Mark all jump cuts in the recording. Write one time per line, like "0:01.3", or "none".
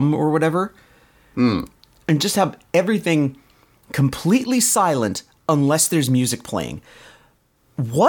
none